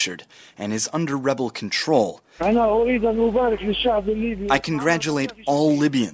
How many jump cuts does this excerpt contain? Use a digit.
1